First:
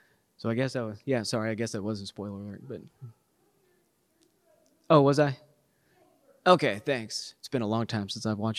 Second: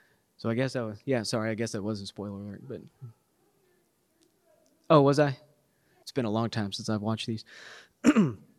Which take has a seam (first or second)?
second